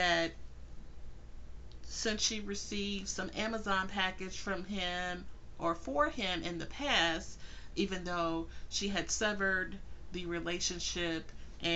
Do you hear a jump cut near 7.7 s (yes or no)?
yes